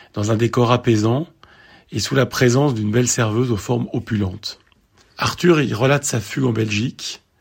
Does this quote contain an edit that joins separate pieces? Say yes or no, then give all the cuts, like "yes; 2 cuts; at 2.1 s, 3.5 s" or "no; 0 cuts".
yes; 1 cut; at 5.0 s